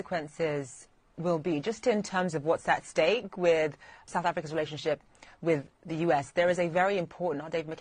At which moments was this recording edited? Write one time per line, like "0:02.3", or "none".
0:04.1